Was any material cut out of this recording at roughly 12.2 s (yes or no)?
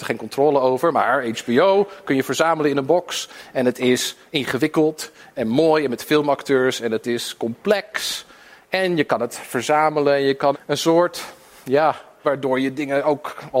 yes